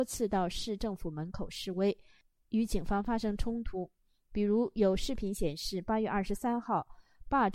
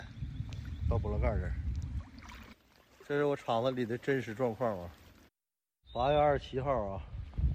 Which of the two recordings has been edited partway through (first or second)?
second